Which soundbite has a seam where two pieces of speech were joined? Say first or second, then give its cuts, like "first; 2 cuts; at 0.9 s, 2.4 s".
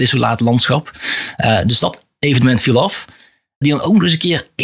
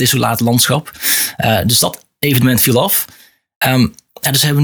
first; 1 cut; at 3.6 s